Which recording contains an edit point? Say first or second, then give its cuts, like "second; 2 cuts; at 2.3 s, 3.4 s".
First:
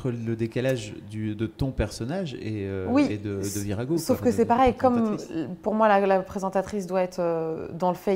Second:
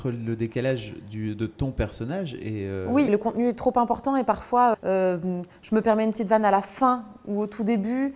second; 2 cuts; at 3.1 s, 4.7 s